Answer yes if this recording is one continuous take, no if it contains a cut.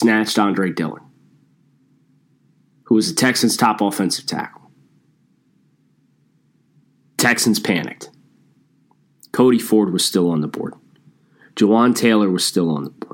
yes